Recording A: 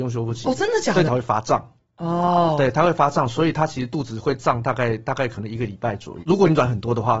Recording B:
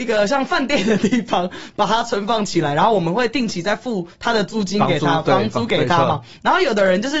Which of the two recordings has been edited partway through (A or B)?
A